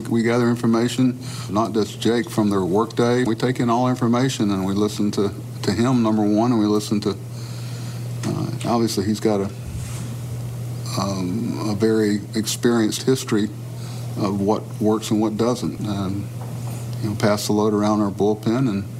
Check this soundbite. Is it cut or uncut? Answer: cut